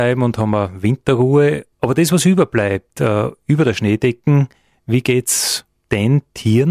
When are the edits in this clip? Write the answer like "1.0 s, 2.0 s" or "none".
1.7 s